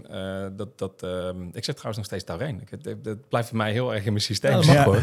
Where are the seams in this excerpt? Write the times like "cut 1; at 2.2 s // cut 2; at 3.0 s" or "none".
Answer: none